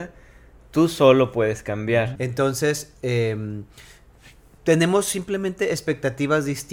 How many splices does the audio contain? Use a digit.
1